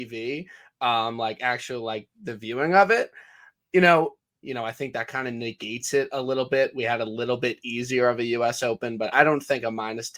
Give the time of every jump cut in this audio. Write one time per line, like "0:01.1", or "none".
0:04.4
0:09.1